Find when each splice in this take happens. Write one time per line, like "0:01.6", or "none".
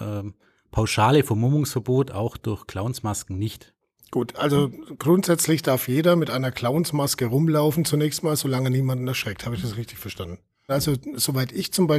0:10.7

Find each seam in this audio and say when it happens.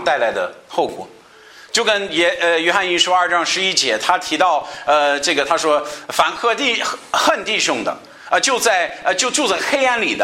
none

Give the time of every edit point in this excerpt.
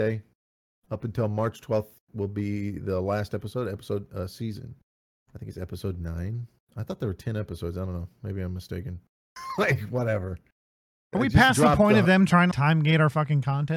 0:09.4
0:12.5

